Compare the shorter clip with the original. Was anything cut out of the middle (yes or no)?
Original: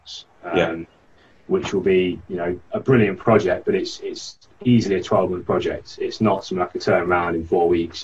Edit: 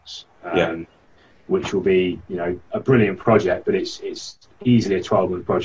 no